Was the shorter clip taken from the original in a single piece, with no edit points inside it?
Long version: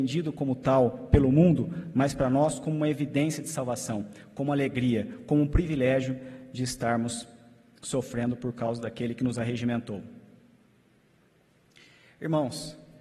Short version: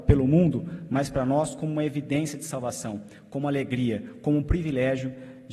yes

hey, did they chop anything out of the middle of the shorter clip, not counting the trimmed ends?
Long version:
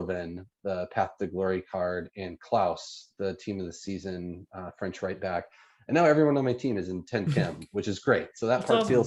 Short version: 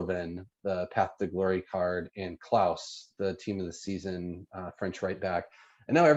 no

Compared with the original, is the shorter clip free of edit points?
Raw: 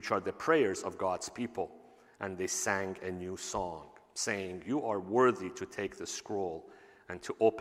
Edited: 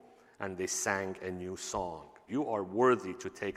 no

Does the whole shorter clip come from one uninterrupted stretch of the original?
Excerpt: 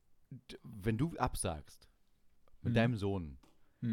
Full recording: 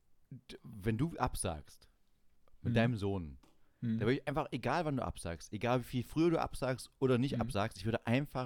yes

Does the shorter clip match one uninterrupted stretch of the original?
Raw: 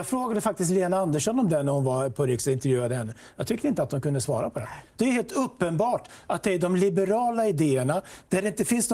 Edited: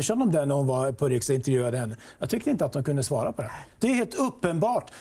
yes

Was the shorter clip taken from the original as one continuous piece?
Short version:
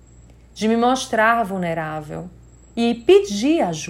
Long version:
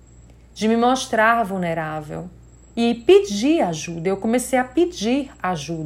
yes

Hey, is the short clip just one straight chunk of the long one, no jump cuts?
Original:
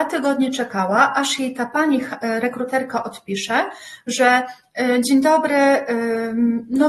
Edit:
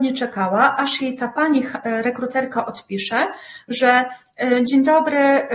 yes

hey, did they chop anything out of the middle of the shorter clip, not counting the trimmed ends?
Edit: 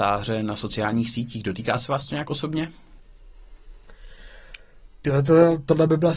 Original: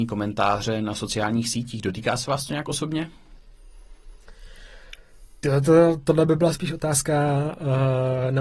no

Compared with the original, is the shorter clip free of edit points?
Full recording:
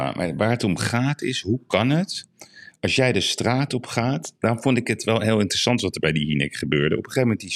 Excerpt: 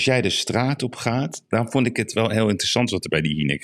yes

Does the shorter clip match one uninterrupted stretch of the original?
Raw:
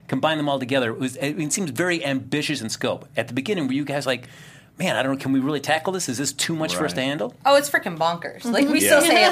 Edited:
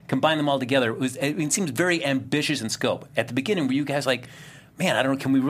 yes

